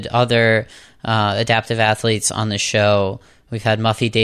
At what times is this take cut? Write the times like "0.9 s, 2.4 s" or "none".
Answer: none